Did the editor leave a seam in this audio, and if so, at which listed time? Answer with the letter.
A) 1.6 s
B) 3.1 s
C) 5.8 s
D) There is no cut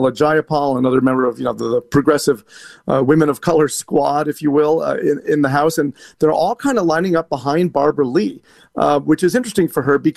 D